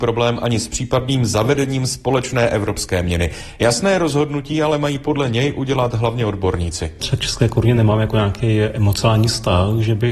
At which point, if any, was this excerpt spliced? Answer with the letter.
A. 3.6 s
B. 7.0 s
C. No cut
C